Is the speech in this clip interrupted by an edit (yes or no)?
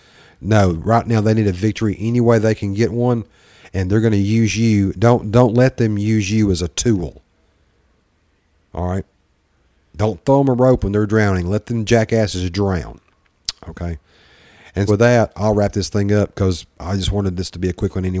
yes